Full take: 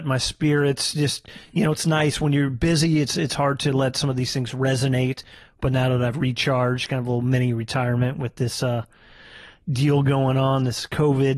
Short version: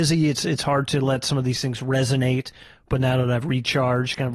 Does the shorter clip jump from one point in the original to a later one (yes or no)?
no